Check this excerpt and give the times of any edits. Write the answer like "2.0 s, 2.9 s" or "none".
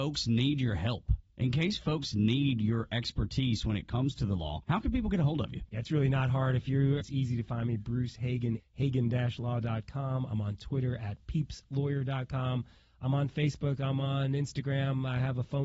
7.0 s, 8.6 s